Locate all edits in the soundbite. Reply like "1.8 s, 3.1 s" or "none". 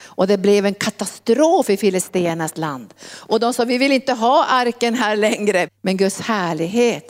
5.7 s